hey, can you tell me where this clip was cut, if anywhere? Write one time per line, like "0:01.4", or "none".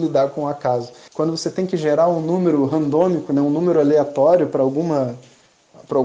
0:01.1